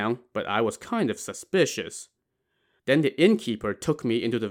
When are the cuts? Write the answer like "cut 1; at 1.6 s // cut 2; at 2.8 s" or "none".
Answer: cut 1; at 2.8 s